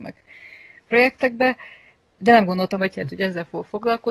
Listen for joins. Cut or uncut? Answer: cut